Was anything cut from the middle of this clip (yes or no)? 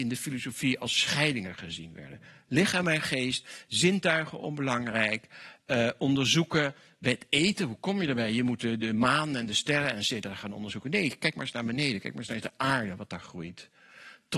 no